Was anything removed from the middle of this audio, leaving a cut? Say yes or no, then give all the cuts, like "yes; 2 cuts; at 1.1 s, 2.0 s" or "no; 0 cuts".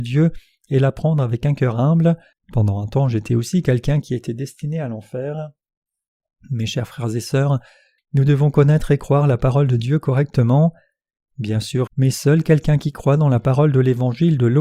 yes; 3 cuts; at 2.3 s, 8.0 s, 11.9 s